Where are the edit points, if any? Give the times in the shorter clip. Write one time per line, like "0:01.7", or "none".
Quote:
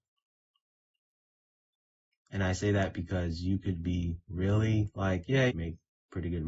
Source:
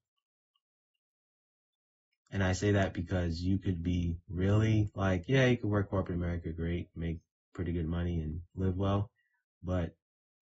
0:05.5